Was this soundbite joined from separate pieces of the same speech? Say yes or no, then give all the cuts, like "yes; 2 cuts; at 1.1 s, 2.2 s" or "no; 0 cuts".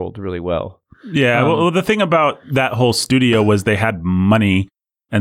no; 0 cuts